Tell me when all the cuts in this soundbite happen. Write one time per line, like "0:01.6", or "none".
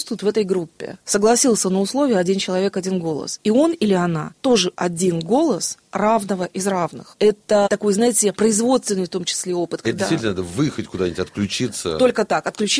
0:07.2
0:08.3
0:09.8